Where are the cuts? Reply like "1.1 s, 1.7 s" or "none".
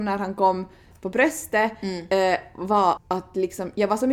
3.0 s